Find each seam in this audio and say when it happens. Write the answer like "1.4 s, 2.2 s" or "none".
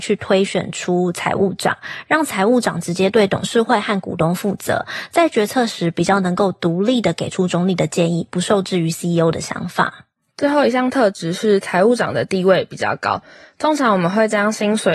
none